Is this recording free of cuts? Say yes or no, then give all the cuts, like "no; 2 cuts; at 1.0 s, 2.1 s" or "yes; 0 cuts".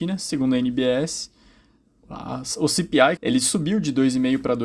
no; 1 cut; at 3.2 s